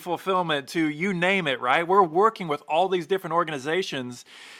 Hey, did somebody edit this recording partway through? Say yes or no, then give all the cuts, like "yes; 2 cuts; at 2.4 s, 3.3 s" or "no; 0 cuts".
no; 0 cuts